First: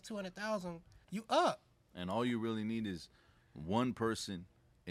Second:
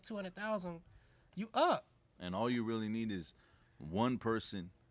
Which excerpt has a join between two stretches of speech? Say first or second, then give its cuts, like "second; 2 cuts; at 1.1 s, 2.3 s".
first; 1 cut; at 1.0 s